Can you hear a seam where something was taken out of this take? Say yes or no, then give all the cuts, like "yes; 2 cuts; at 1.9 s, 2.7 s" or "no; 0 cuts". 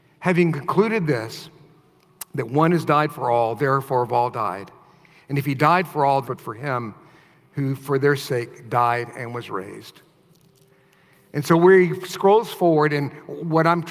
yes; 1 cut; at 6.2 s